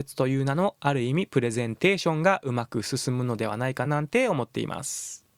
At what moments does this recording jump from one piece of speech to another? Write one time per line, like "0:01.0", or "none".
0:03.8